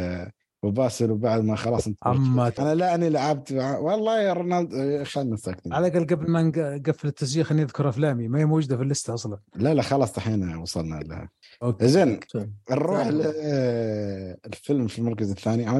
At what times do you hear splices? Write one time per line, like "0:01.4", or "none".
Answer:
0:02.6